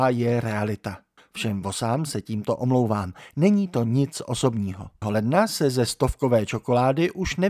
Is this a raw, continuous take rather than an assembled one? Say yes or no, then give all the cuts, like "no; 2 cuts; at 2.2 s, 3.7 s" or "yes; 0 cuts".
no; 2 cuts; at 1.2 s, 5.0 s